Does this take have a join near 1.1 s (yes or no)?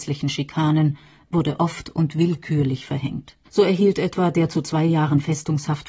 no